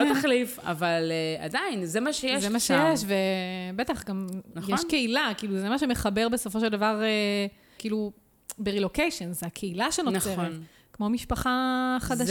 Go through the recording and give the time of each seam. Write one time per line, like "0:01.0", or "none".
0:07.8